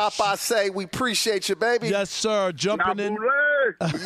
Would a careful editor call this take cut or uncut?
uncut